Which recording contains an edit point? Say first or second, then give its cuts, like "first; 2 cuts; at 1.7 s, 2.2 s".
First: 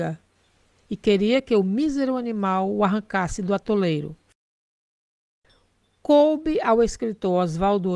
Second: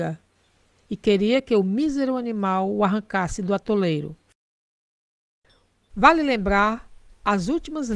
second; 1 cut; at 5.9 s